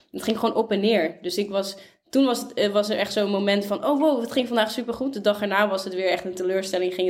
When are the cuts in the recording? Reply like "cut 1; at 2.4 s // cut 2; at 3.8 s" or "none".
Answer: none